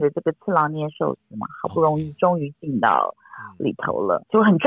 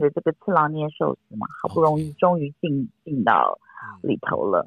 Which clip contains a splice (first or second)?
first